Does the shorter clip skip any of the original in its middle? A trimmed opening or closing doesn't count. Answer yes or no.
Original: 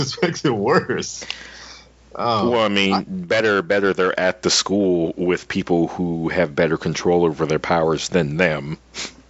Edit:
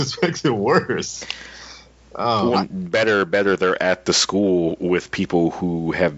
yes